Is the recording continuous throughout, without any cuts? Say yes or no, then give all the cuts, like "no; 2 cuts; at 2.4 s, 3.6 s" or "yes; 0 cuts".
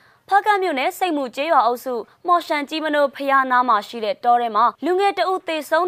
no; 1 cut; at 4.7 s